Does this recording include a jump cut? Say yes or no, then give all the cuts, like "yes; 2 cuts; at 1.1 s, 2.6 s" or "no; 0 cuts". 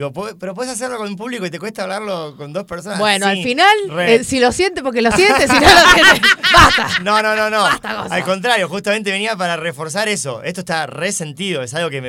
no; 0 cuts